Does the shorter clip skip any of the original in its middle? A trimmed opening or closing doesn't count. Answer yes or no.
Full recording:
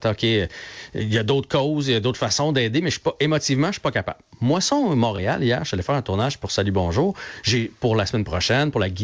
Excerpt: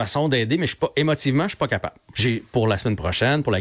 yes